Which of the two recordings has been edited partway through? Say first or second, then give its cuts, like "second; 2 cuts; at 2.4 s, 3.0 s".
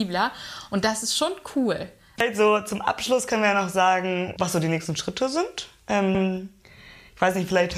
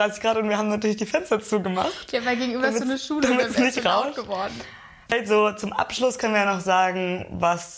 first; 2 cuts; at 2.1 s, 4.4 s